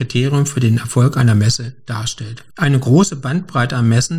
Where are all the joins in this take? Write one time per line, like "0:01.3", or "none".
0:02.5